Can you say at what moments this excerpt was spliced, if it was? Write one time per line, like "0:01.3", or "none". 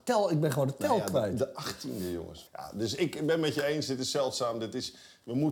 0:02.5